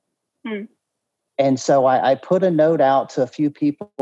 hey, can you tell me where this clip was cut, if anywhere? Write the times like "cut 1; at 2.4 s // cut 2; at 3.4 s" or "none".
cut 1; at 1.3 s